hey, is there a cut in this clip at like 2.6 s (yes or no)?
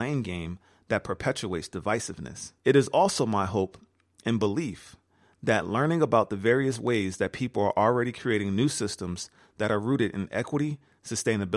yes